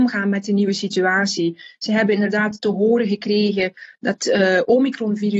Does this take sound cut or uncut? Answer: uncut